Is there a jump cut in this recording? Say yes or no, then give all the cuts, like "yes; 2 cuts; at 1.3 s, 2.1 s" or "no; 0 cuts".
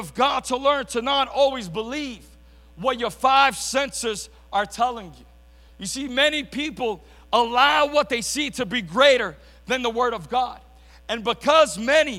no; 0 cuts